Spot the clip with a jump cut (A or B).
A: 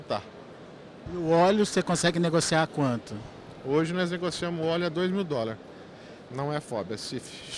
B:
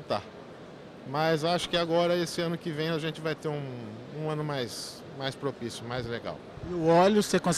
A